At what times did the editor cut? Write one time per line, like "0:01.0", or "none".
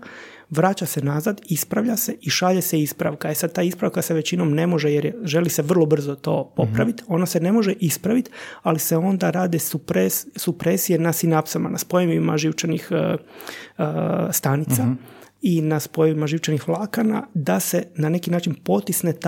none